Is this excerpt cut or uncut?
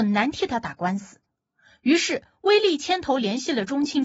uncut